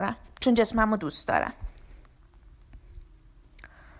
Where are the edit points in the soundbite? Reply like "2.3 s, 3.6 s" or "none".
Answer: none